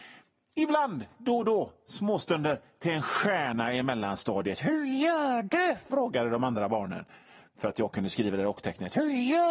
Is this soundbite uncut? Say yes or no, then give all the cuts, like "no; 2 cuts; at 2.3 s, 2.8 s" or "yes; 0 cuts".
yes; 0 cuts